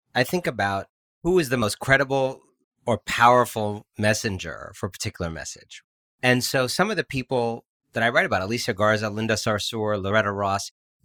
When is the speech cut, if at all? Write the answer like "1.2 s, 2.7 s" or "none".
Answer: none